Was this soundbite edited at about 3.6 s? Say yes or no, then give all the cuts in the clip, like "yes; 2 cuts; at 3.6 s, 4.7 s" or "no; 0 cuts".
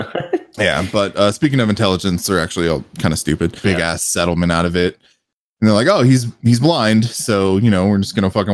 yes; 1 cut; at 3.6 s